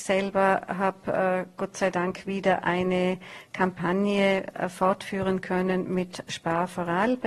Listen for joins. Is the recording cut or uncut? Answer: uncut